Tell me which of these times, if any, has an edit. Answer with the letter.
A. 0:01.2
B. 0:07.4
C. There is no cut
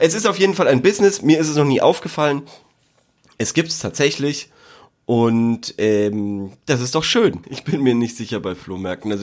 B